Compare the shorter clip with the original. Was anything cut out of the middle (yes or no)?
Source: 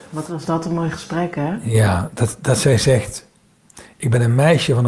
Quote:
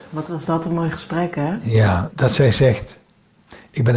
yes